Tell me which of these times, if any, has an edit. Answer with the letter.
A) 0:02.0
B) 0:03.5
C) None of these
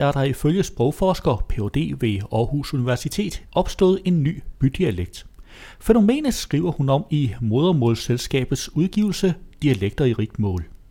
B